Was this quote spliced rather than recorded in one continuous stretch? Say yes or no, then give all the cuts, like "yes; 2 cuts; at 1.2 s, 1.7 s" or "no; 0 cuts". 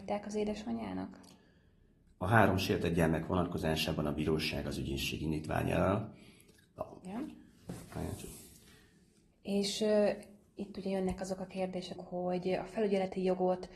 yes; 3 cuts; at 7.0 s, 9.3 s, 12.0 s